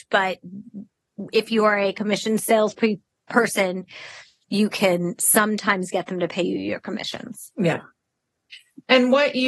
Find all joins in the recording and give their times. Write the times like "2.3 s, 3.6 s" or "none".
none